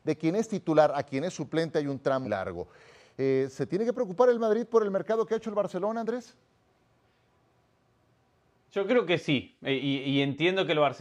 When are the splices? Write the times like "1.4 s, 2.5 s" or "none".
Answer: 2.2 s